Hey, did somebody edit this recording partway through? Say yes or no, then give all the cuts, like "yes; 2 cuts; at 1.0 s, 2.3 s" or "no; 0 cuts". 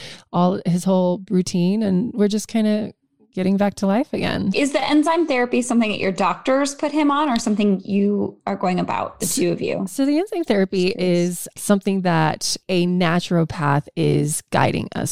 yes; 1 cut; at 4.5 s